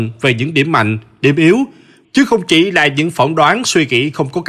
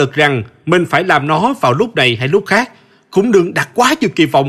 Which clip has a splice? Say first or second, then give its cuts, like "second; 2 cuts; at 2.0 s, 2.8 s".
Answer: first; 1 cut; at 2.0 s